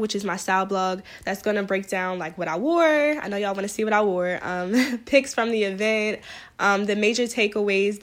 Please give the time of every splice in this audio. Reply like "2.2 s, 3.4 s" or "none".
none